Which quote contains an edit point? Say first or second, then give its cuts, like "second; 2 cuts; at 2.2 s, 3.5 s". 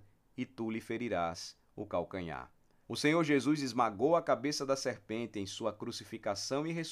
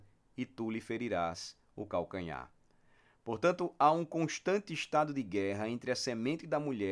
first; 1 cut; at 2.8 s